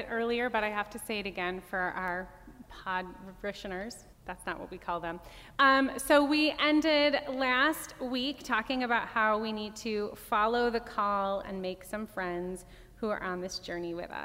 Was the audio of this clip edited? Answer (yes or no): yes